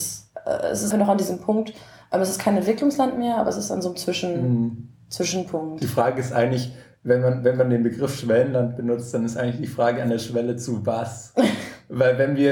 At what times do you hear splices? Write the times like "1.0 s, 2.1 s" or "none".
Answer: 0.9 s